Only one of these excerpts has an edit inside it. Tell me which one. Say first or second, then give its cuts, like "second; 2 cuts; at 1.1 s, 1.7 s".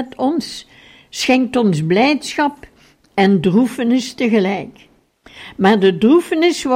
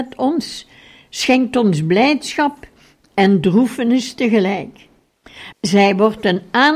second; 1 cut; at 5.5 s